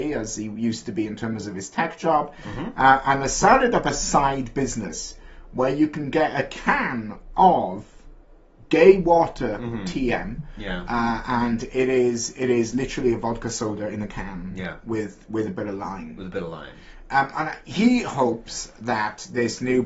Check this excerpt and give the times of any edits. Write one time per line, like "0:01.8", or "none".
none